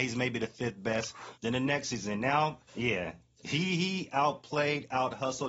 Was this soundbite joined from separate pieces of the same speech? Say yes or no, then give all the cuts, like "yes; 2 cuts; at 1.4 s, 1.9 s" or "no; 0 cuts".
yes; 2 cuts; at 1.3 s, 2.7 s